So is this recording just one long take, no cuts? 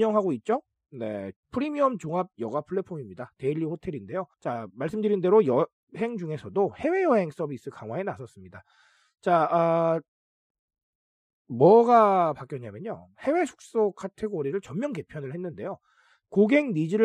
no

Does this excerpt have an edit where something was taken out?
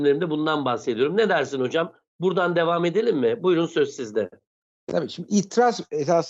no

